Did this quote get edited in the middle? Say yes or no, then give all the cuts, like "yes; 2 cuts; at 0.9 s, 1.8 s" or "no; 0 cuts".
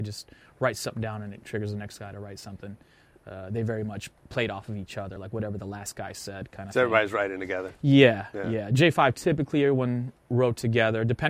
no; 0 cuts